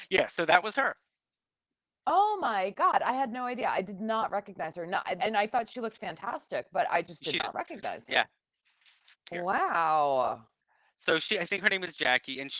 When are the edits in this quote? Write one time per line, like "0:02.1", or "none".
0:05.2
0:09.1